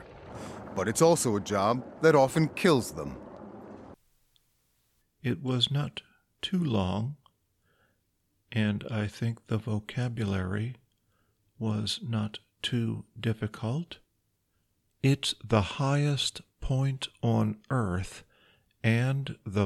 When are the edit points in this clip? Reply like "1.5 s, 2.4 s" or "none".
5.0 s, 14.9 s